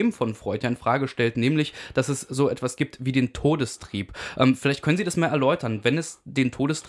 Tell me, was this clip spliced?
no; 0 cuts

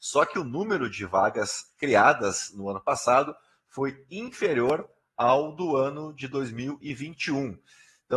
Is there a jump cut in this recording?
no; 0 cuts

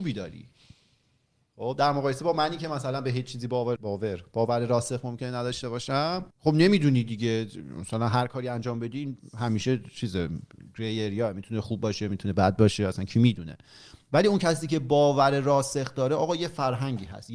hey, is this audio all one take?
no; 2 cuts; at 3.8 s, 6.3 s

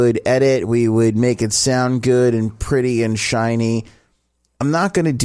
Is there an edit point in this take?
no; 0 cuts

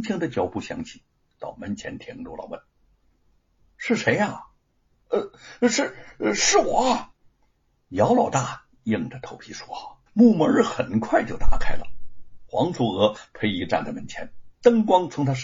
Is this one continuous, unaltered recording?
no; 1 cut; at 10.1 s

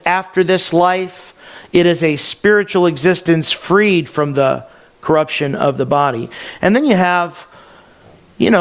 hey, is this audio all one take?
yes; 0 cuts

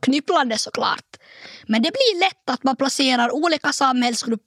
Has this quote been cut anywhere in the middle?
no; 0 cuts

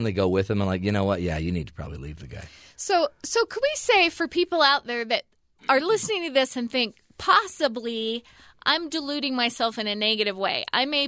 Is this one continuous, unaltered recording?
yes; 0 cuts

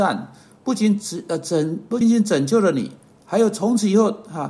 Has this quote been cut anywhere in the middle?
yes; 1 cut; at 2.0 s

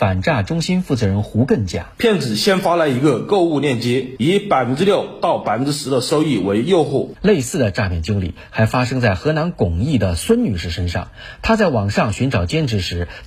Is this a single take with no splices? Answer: no; 1 cut; at 7.1 s

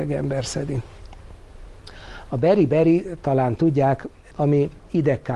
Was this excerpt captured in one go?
no; 1 cut; at 4.3 s

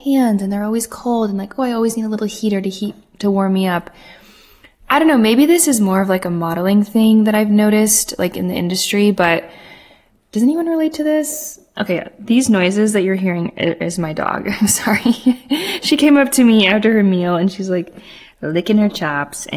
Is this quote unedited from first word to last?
yes; 0 cuts

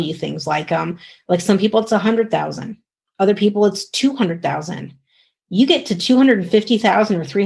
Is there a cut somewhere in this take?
no; 0 cuts

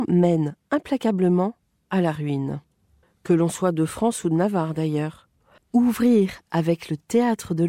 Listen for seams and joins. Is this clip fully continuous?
no; 1 cut; at 5.6 s

